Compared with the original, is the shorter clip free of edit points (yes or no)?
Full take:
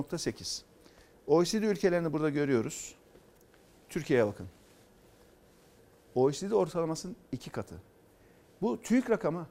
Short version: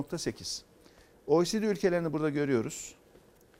yes